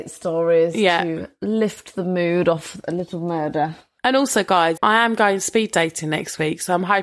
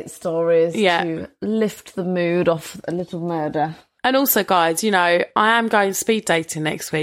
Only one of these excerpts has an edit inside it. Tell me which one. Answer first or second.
first